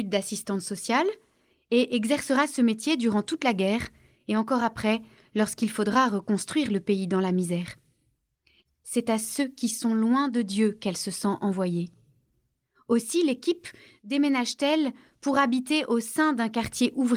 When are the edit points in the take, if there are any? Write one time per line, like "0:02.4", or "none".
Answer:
0:08.7